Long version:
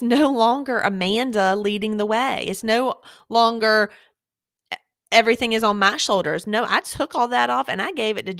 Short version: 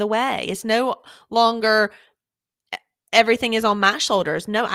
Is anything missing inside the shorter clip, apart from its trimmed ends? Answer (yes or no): no